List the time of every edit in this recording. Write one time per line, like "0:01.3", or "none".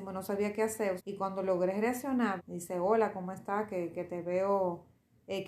0:01.0
0:02.4